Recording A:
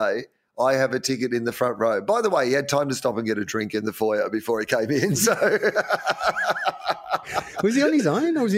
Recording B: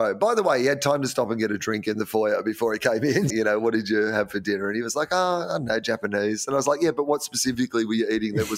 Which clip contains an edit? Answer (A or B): B